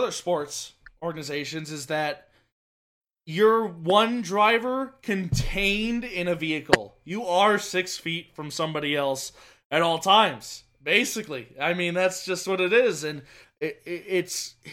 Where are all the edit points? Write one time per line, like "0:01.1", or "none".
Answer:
0:13.4